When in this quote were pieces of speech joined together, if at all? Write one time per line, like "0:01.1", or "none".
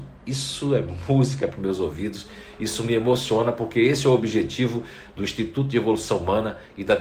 none